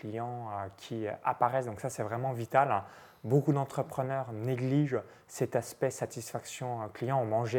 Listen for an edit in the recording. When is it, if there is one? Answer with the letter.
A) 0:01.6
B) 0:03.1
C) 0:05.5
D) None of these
D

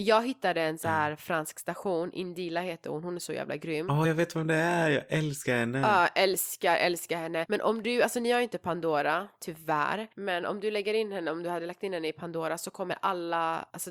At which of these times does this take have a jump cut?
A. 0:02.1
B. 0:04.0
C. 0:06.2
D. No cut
D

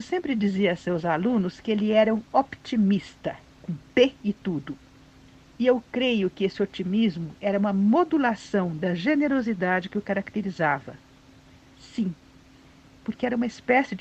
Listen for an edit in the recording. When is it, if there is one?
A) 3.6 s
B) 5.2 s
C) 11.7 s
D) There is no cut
A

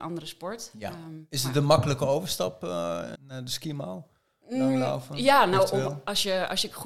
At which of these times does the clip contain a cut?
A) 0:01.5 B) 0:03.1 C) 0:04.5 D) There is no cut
B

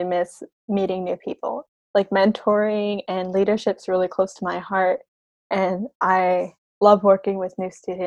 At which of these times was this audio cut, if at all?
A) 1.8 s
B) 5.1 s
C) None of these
C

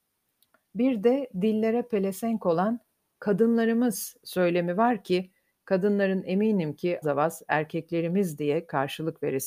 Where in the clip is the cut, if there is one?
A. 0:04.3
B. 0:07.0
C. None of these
B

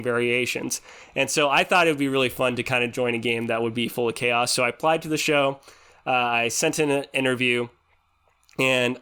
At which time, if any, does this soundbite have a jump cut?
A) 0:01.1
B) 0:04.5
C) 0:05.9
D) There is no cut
D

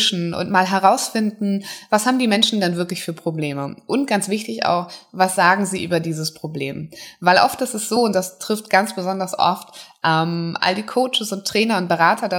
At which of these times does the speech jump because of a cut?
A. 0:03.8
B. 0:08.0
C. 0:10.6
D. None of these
D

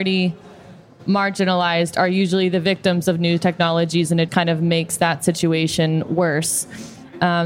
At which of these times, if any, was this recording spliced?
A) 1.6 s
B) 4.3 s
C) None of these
B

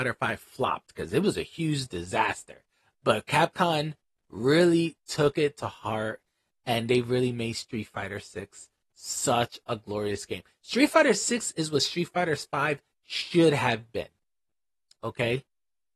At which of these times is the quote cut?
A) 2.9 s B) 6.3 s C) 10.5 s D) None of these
D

